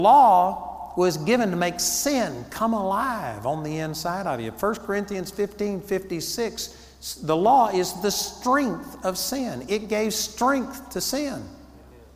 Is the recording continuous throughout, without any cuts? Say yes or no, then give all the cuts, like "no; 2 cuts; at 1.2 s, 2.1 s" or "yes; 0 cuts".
yes; 0 cuts